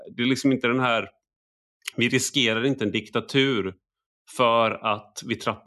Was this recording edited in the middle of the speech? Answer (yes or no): no